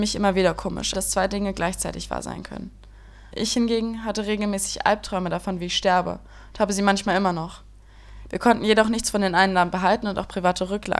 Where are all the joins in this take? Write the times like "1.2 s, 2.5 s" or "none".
0.9 s, 3.3 s, 8.3 s